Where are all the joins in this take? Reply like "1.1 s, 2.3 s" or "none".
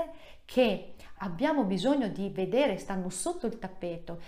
1.2 s